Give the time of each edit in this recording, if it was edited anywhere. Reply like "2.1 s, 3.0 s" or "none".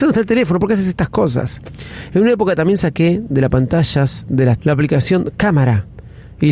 4.6 s